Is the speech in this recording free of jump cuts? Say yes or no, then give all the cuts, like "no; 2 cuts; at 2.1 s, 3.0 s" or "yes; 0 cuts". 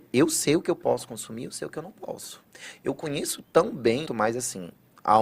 no; 1 cut; at 4.0 s